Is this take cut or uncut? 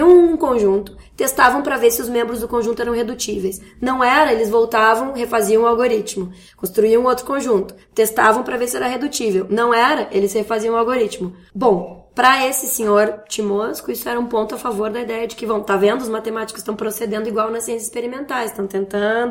uncut